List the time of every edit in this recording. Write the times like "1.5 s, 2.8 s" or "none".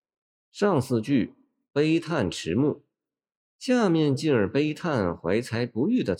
none

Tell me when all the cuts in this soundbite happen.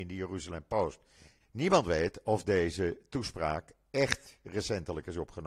1.4 s, 4.4 s

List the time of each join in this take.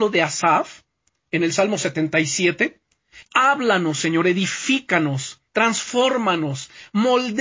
3.2 s, 5.5 s

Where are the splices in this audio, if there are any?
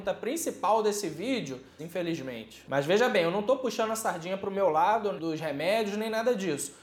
1.8 s, 5.2 s

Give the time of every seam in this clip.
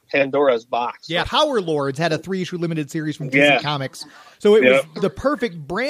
1.2 s

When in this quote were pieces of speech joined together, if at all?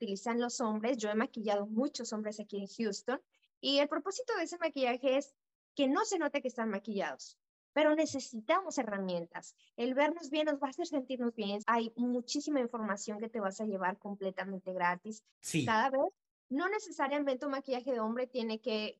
11.6 s, 15.3 s

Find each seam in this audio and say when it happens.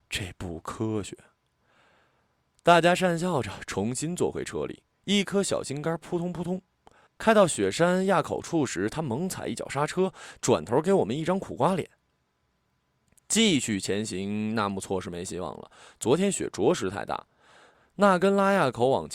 7.1 s

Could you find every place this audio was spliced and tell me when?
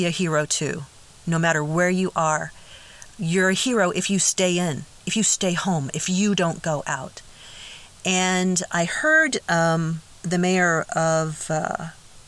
10.2 s

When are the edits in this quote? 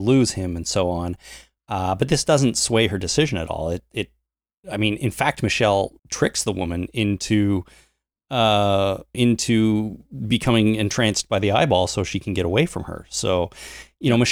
6.0 s, 9.1 s

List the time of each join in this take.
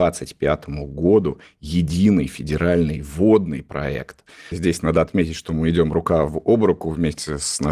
4.5 s

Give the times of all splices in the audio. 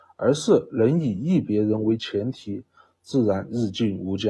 2.9 s

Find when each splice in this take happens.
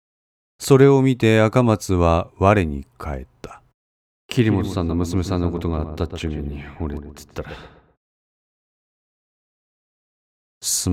4.1 s

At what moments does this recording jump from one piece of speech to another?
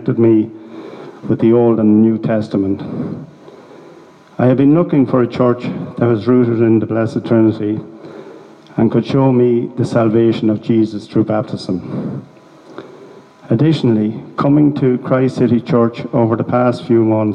none

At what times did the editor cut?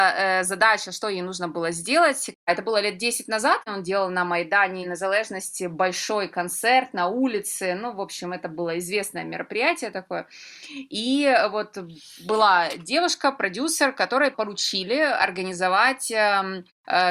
2.3 s

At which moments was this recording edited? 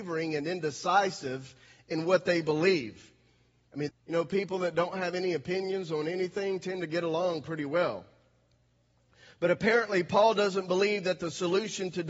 3.9 s

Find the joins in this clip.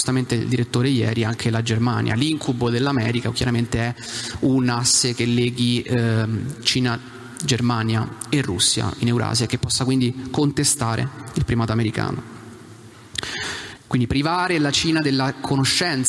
13.8 s

